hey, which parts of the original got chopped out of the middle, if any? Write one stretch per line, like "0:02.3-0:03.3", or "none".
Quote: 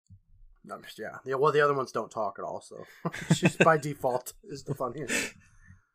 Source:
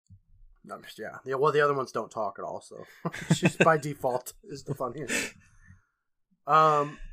none